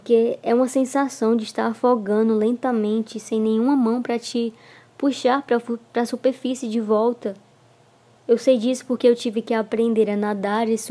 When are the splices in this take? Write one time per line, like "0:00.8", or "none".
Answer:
none